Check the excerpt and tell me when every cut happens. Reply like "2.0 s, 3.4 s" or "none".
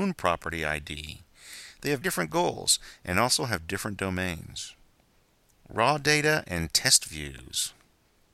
2.0 s